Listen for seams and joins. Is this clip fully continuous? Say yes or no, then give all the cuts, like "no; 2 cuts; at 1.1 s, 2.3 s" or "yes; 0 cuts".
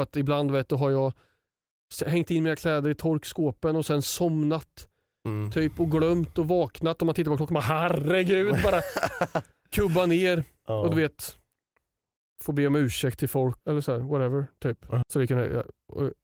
no; 2 cuts; at 13.6 s, 15.0 s